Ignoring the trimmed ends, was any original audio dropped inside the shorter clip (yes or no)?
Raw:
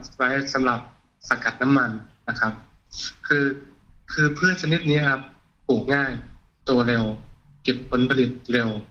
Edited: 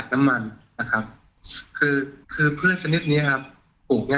yes